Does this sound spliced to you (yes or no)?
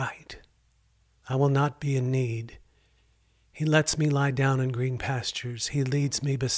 yes